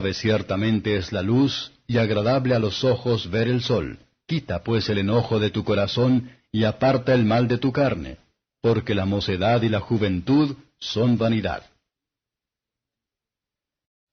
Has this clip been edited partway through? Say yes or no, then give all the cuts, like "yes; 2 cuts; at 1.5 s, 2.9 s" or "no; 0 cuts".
yes; 1 cut; at 4.3 s